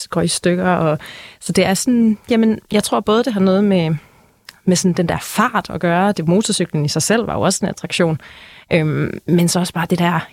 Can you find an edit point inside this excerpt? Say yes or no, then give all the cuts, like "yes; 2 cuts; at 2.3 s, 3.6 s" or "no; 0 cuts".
no; 0 cuts